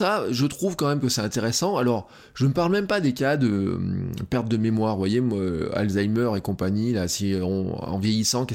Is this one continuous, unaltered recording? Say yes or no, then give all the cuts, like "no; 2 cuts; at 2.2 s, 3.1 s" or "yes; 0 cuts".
yes; 0 cuts